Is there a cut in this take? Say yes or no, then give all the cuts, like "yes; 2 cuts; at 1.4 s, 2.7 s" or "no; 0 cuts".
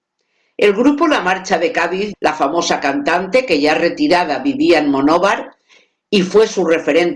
yes; 1 cut; at 2.1 s